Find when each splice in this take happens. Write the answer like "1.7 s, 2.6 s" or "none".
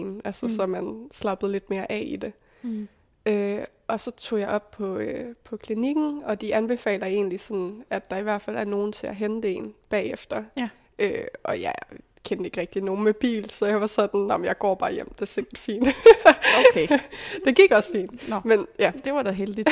none

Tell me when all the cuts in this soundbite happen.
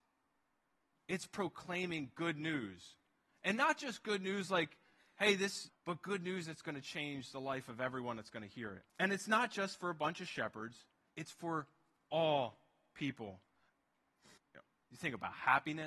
5.7 s, 8.9 s, 14.4 s

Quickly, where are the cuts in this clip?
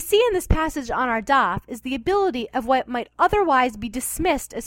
none

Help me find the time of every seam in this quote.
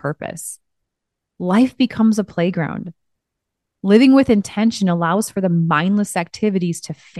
none

